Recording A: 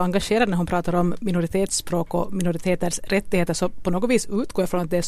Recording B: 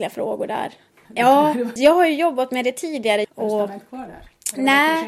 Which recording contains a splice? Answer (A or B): B